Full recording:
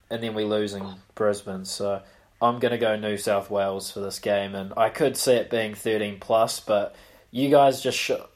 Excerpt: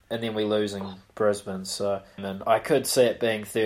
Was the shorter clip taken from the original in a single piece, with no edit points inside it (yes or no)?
no